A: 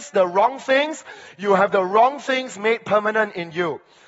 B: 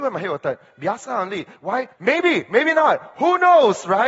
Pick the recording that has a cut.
B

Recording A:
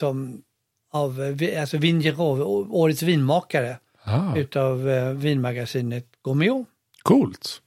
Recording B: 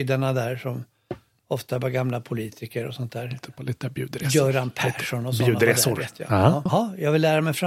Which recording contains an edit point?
B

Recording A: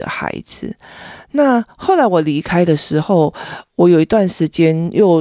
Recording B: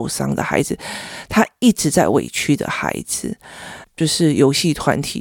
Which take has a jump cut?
B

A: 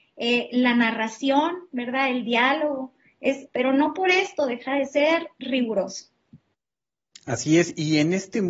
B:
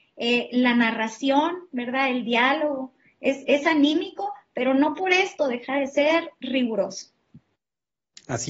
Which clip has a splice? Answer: A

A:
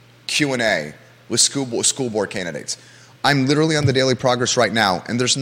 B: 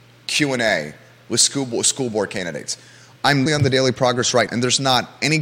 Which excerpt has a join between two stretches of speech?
B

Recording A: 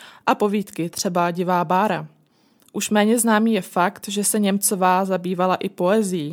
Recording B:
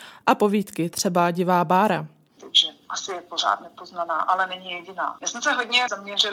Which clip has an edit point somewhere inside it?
B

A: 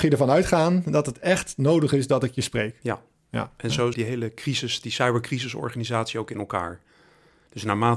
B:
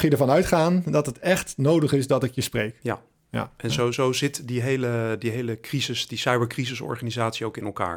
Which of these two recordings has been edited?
A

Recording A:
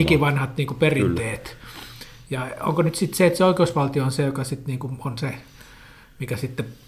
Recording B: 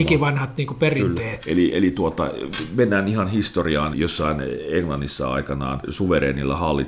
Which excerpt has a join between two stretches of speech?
B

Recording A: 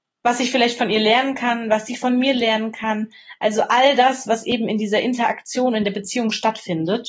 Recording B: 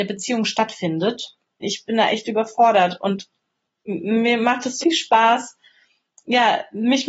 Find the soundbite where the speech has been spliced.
B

